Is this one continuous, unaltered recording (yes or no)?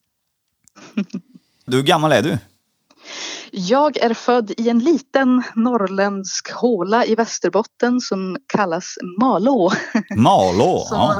no